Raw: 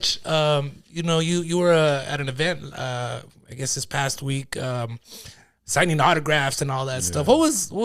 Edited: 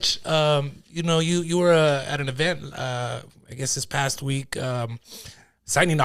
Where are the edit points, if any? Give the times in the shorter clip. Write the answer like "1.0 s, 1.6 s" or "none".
none